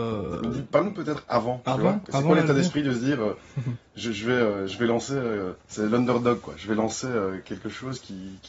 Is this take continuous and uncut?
no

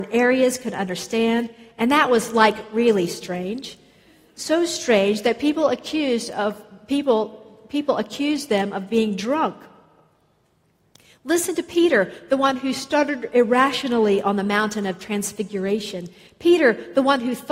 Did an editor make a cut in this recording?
no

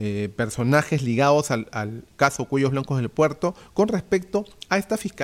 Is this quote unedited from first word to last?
yes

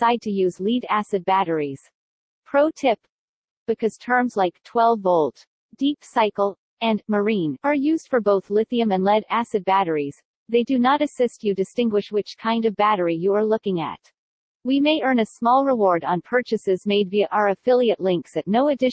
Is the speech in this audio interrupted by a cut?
no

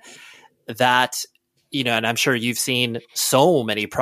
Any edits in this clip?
no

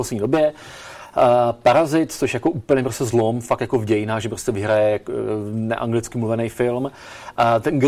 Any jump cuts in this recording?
no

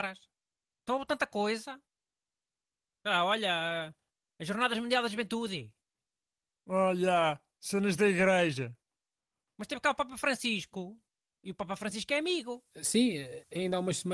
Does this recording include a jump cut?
yes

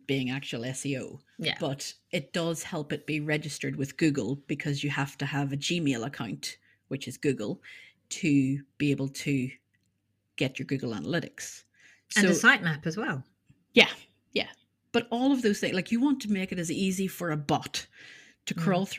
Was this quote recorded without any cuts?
yes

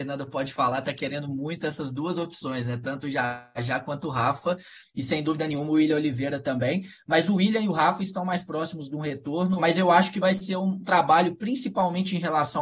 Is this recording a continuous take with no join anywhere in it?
no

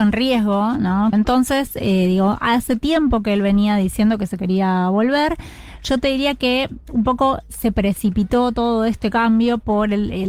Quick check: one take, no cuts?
no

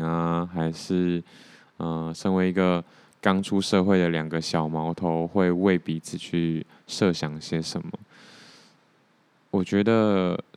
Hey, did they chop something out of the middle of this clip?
no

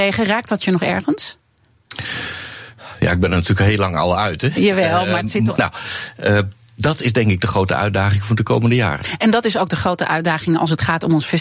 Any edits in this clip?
yes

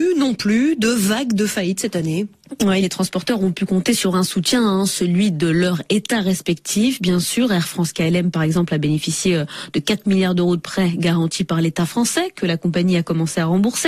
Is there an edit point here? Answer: no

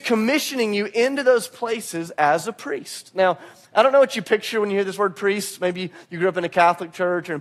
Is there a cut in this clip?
no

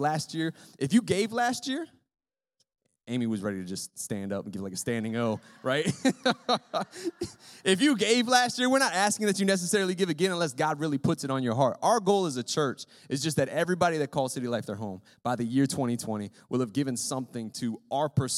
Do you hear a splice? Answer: no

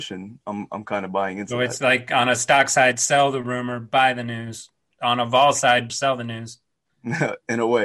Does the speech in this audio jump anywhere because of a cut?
yes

